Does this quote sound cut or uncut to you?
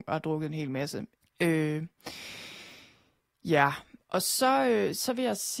cut